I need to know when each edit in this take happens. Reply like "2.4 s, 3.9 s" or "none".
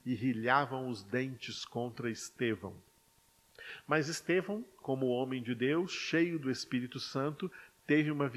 none